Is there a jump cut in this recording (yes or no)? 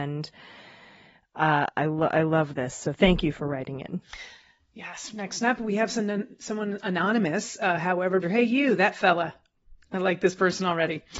yes